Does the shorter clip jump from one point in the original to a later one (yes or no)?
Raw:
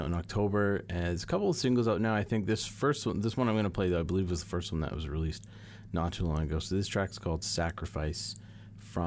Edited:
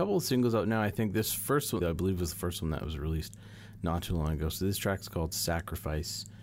yes